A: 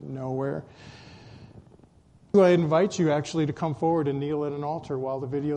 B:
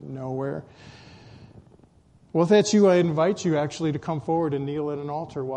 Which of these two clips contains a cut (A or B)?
A